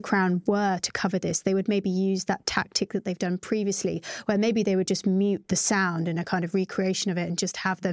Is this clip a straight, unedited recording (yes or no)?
yes